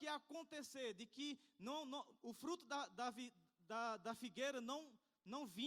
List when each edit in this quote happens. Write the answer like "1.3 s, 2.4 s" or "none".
none